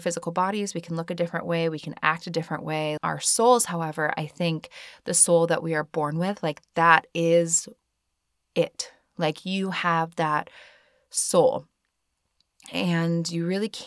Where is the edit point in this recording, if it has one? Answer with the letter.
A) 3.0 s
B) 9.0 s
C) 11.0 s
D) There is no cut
A